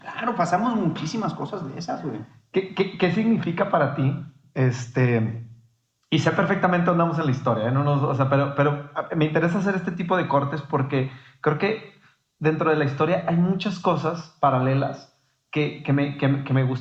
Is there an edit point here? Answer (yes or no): no